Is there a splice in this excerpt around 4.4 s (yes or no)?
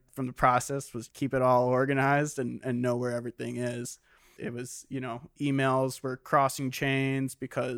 yes